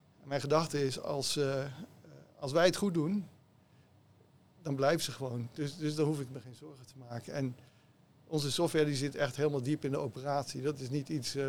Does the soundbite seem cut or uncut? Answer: uncut